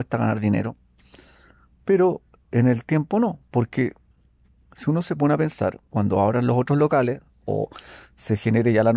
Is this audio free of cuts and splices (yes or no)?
yes